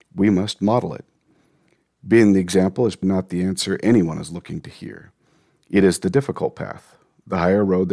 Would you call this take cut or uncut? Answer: cut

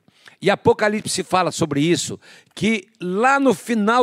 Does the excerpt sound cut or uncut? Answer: uncut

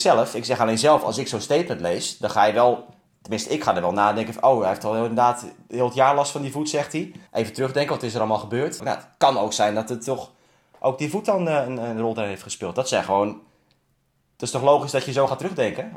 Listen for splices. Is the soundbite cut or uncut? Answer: cut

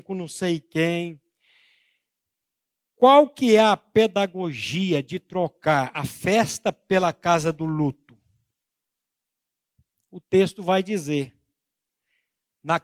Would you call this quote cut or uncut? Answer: uncut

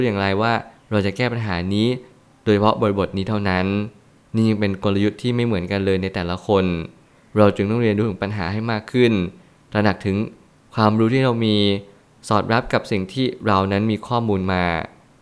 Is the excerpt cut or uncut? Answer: uncut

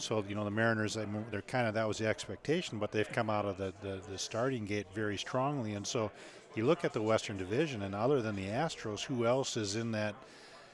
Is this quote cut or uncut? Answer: uncut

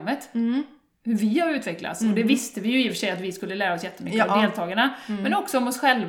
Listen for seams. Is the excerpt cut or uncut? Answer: uncut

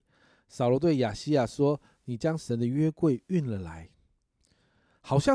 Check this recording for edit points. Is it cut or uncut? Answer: uncut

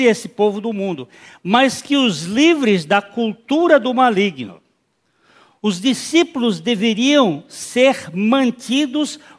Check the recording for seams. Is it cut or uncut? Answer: uncut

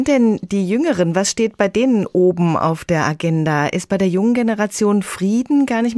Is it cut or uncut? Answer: uncut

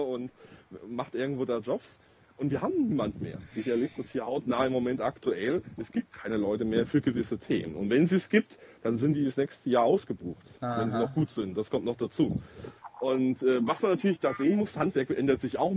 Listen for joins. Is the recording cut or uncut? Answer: uncut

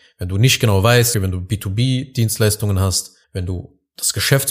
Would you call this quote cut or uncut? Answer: cut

